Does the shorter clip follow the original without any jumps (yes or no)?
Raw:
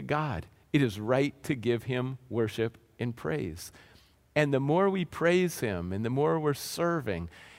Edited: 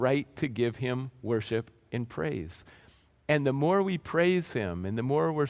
yes